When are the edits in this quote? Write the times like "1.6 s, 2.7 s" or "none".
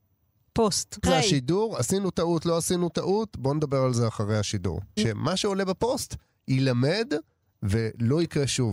1.0 s, 5.0 s